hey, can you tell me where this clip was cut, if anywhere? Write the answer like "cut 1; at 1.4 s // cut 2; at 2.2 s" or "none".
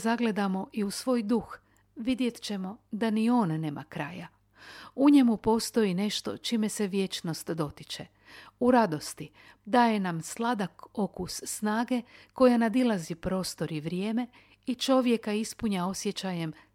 cut 1; at 9.6 s